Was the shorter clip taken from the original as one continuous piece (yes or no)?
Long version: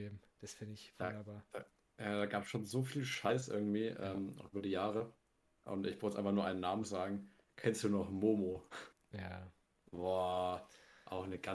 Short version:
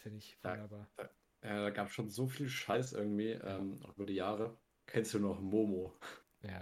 no